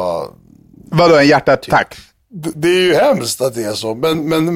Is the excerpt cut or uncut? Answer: cut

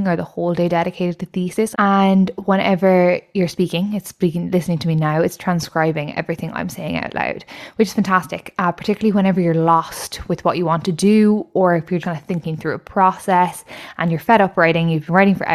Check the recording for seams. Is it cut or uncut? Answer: cut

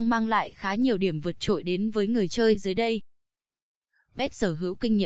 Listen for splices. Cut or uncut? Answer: uncut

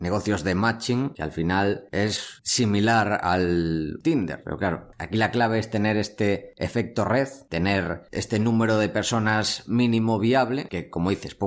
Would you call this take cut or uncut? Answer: cut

